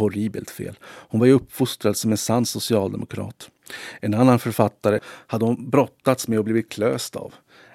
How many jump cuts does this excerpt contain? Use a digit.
1